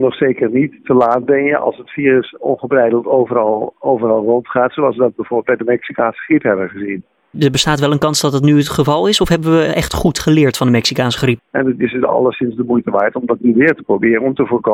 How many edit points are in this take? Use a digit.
1